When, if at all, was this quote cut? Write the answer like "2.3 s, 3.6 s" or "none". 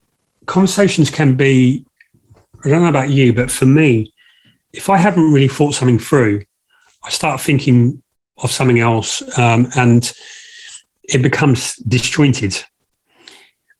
none